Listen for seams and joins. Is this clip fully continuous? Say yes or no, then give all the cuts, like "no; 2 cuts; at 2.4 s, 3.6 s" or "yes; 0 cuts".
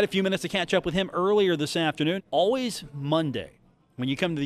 no; 1 cut; at 2.2 s